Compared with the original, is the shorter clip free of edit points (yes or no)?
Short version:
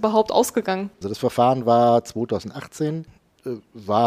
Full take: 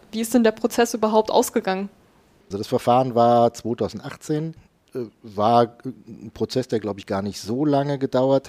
no